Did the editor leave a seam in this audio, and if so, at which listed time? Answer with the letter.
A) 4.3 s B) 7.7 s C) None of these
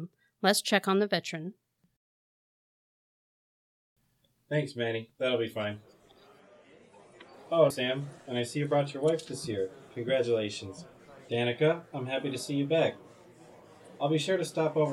B